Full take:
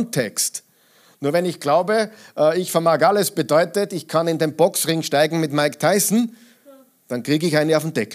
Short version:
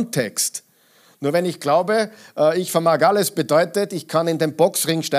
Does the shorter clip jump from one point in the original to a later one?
no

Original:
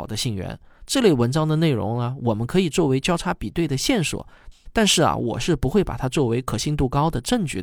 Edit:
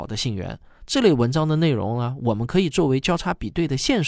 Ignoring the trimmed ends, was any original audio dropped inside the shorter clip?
no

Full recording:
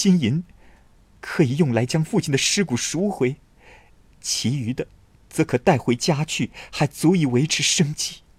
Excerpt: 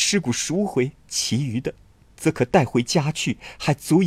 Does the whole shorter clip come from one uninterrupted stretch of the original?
no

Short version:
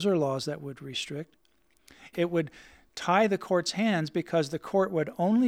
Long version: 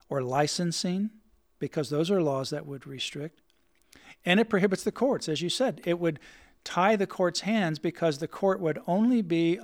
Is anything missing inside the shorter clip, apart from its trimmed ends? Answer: yes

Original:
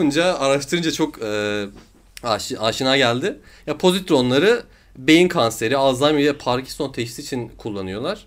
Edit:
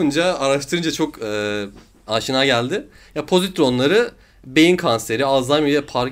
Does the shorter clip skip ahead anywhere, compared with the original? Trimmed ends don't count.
yes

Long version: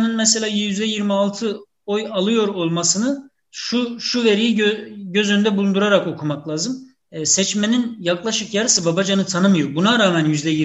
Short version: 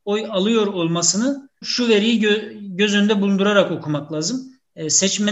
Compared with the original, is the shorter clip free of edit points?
no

